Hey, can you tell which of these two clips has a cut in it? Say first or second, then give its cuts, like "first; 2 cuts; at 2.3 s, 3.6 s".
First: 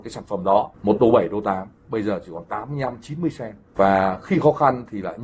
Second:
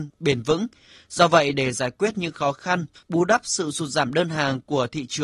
second; 1 cut; at 2.9 s